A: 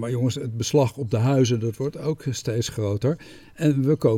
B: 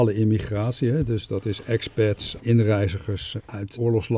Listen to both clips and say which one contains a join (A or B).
B